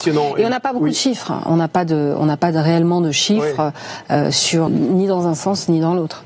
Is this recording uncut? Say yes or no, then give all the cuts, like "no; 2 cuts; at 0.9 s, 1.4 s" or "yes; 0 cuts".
no; 1 cut; at 4.7 s